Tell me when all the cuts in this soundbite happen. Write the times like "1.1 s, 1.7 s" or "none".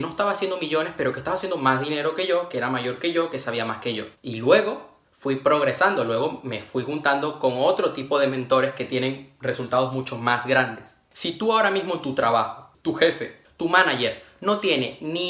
4.1 s